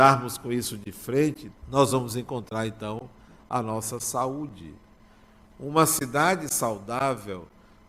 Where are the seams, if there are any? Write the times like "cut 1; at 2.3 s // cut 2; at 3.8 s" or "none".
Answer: cut 1; at 1.5 s